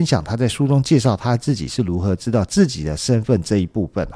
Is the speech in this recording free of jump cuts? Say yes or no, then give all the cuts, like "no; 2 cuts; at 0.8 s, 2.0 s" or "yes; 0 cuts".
yes; 0 cuts